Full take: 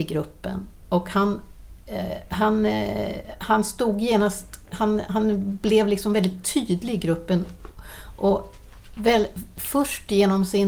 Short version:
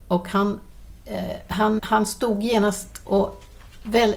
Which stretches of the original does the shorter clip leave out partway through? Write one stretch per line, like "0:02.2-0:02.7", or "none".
0:02.6-0:03.4
0:04.6-0:08.2